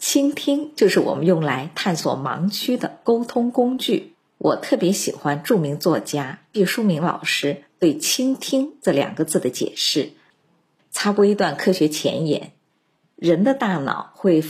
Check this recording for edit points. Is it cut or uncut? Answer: cut